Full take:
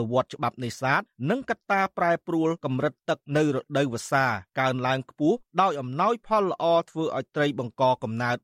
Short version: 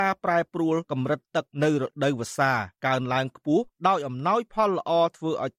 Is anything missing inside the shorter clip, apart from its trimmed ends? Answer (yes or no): no